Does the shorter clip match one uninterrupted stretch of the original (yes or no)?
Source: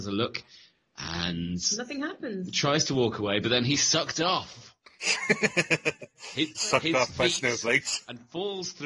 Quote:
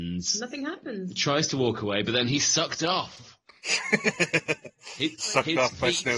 yes